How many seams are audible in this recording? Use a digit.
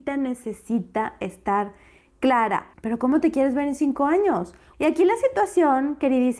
2